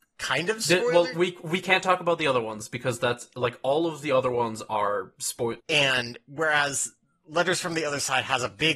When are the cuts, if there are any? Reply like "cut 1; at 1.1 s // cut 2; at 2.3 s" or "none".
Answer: cut 1; at 5.6 s